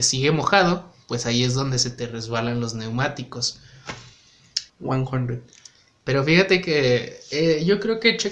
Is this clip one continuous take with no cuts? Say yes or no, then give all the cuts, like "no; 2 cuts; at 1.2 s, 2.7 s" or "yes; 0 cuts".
no; 1 cut; at 4.7 s